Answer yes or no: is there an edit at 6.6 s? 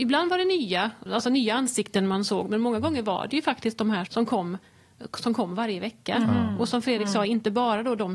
no